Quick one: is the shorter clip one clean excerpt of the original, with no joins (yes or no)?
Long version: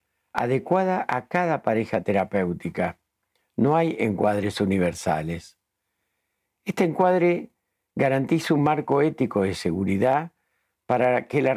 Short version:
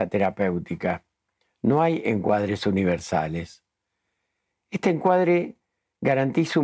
yes